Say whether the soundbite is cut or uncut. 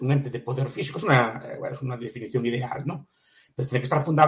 uncut